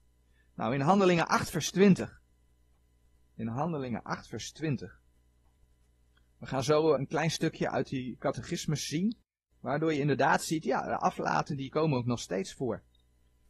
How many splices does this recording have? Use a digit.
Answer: 1